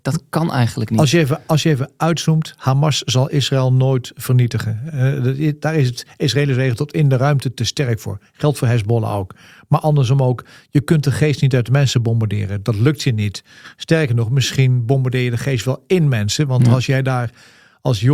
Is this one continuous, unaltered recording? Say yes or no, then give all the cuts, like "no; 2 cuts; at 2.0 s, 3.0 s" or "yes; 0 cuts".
yes; 0 cuts